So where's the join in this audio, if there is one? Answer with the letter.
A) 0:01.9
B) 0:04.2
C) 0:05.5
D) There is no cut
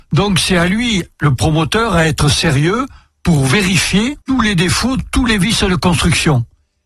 B